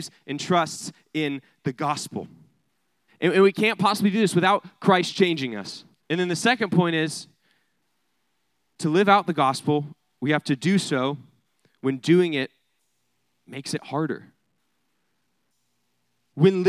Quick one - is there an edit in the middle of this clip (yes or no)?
yes